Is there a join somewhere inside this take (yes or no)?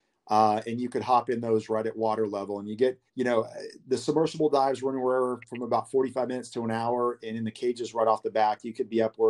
yes